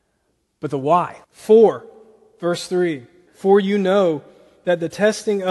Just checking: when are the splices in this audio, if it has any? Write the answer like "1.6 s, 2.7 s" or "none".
1.2 s, 3.3 s